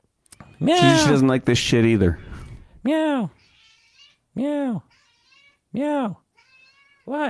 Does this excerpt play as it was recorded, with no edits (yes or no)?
yes